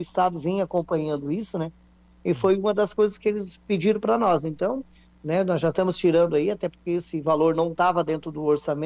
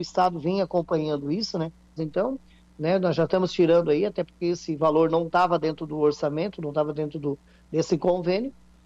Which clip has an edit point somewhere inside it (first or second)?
second